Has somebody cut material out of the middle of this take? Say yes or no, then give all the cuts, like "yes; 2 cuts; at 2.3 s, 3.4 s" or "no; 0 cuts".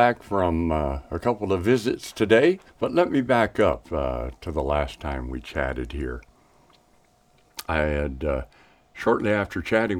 yes; 1 cut; at 2.7 s